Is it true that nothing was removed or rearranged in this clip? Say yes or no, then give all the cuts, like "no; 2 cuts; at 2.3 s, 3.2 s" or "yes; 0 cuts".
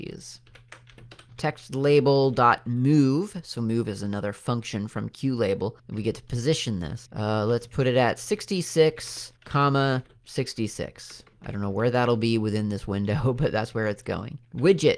yes; 0 cuts